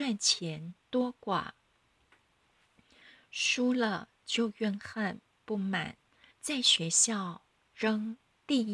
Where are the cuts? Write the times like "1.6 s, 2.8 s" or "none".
6.3 s